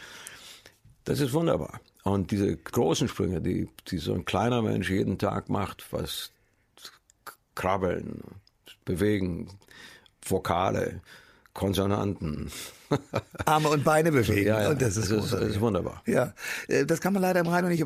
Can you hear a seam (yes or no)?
yes